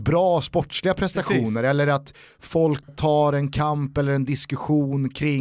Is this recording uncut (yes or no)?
no